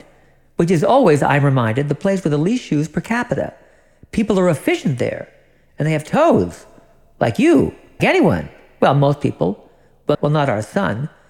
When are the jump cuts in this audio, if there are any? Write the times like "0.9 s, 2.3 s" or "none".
8.0 s, 10.1 s